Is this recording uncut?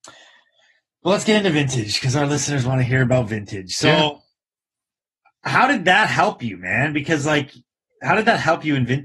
yes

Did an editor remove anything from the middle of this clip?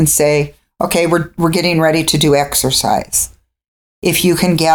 no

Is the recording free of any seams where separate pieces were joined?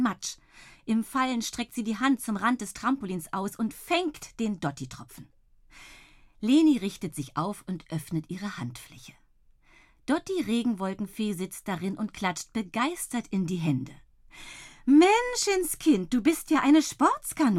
yes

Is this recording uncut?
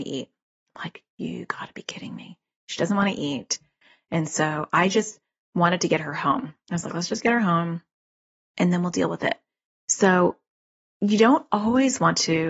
yes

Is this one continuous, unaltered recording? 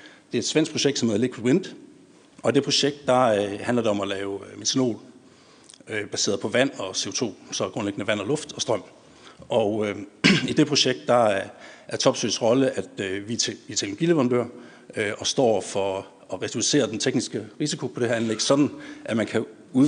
yes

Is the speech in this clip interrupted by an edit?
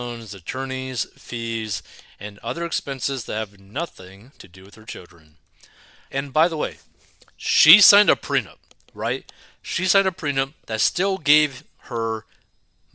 yes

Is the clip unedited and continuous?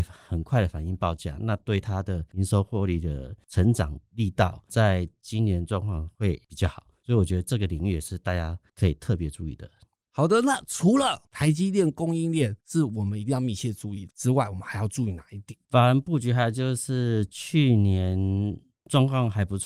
yes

